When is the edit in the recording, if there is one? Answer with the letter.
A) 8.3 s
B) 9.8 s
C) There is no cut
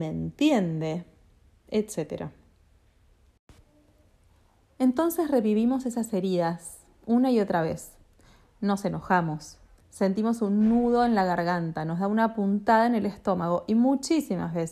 B